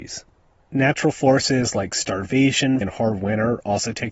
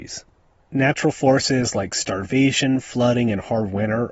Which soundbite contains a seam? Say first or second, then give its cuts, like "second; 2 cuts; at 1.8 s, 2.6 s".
first; 1 cut; at 2.8 s